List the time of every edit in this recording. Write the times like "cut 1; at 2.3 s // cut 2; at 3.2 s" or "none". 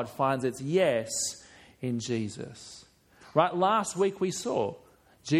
cut 1; at 3.2 s